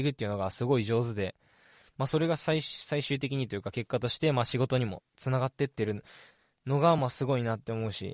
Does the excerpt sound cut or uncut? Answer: uncut